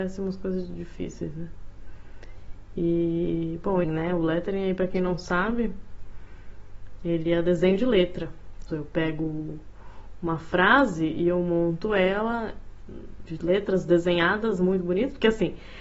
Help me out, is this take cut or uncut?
cut